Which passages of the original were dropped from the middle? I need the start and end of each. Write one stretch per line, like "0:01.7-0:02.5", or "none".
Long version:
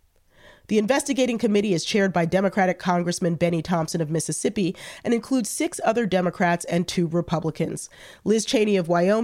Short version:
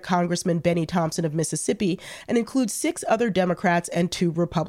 none